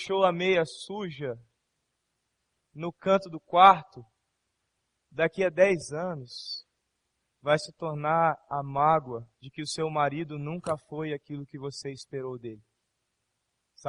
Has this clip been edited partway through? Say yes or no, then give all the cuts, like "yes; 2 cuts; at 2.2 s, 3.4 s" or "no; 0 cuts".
yes; 1 cut; at 9.3 s